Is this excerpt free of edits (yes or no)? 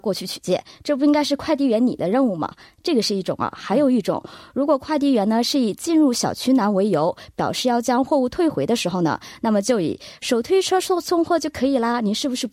yes